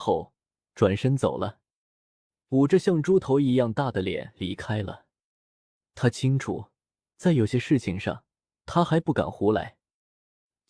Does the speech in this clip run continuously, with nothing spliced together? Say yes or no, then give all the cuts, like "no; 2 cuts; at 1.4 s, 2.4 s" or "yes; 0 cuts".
yes; 0 cuts